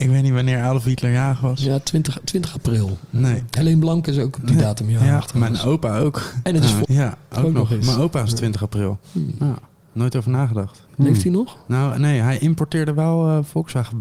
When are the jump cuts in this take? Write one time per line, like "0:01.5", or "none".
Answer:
0:06.8
0:09.0